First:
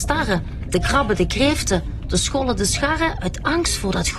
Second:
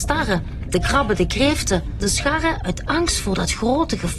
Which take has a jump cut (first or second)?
second